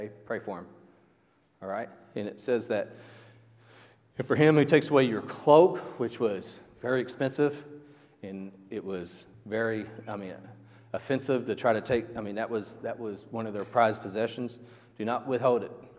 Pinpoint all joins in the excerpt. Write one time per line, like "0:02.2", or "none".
none